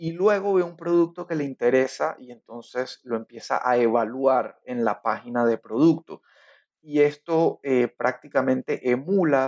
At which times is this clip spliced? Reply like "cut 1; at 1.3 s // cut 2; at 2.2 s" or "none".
none